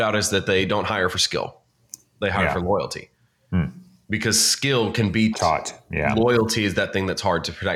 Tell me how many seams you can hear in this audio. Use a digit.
1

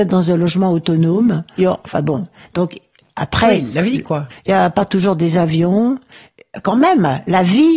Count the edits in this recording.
2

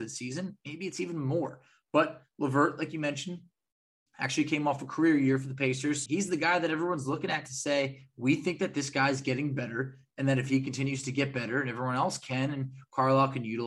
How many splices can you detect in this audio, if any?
1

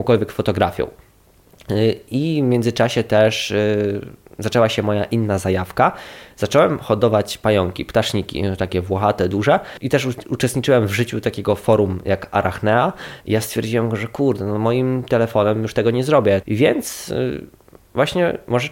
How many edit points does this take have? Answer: 2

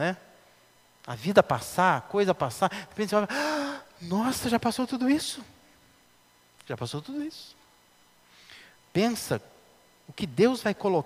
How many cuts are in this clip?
0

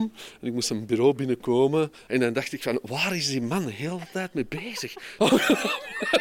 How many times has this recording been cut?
2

